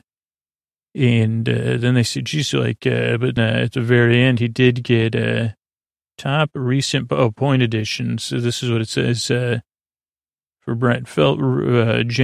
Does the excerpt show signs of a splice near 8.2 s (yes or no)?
no